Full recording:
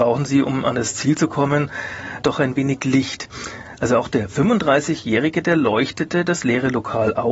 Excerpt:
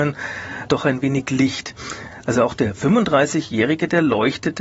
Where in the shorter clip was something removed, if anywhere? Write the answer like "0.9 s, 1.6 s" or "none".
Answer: none